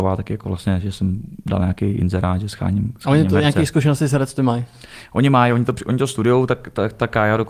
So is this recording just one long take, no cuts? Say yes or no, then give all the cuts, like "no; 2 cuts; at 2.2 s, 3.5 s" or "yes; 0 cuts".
yes; 0 cuts